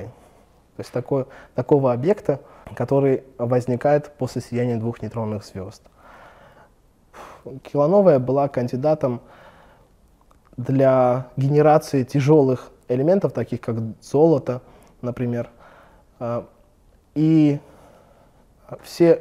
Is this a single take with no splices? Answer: yes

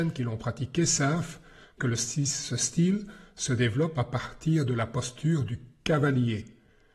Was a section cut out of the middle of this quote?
yes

